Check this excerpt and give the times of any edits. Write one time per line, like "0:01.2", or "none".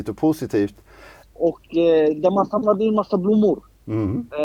0:01.2